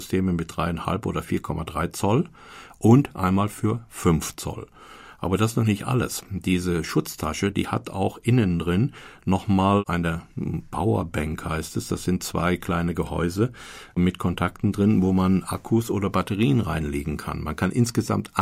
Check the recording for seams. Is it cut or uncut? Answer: uncut